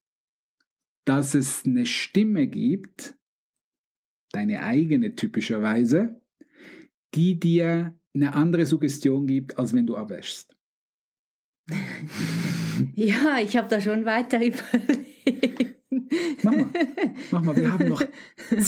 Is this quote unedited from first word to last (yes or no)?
no